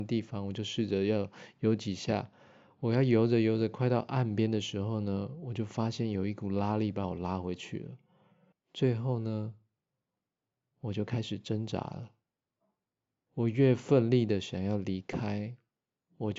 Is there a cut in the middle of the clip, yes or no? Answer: yes